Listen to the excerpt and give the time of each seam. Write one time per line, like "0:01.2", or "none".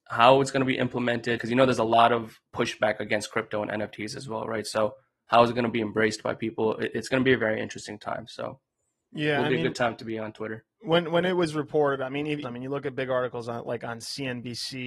0:01.4
0:12.4

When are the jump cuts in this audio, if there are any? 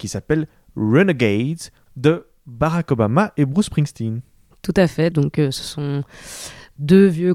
0:01.9
0:05.1

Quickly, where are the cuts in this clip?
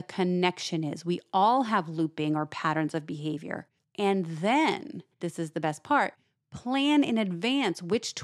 0:03.8
0:05.2

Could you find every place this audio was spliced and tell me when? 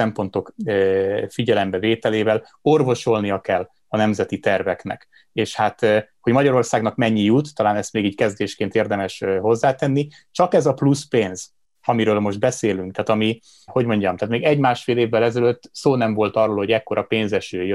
0:13.7

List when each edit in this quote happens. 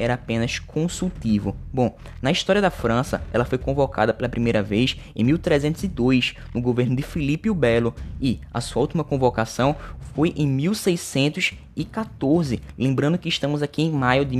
none

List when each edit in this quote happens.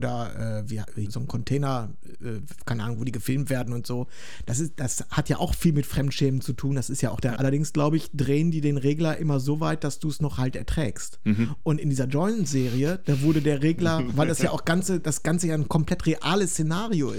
0:01.1
0:07.4

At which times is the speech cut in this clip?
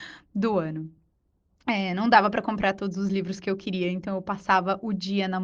none

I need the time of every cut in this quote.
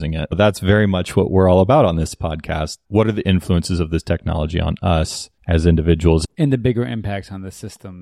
0:05.4

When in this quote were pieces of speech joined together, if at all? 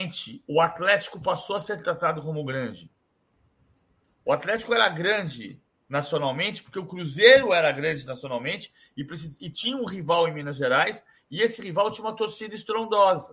0:04.0

